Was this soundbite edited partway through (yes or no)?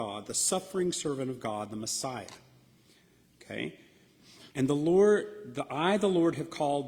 yes